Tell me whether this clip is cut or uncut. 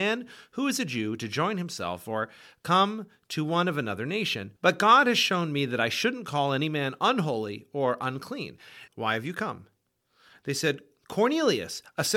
cut